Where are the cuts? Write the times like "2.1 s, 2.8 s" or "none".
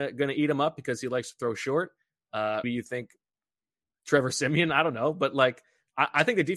2.6 s